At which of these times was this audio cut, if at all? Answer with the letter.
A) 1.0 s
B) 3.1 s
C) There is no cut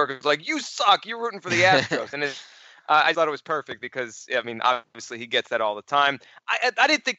B